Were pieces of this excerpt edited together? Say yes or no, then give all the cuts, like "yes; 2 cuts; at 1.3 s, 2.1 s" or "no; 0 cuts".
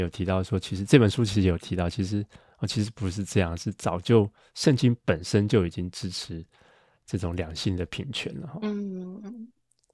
no; 0 cuts